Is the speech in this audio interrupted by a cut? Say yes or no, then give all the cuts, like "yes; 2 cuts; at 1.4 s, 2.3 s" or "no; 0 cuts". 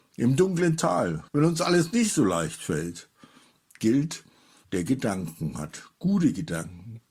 yes; 2 cuts; at 1.3 s, 4.6 s